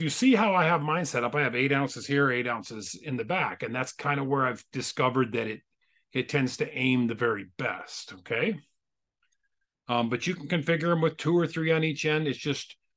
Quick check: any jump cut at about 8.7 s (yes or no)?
no